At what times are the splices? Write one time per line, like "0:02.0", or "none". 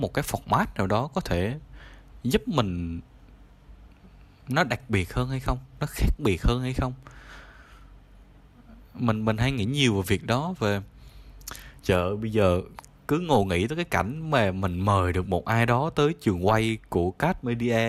none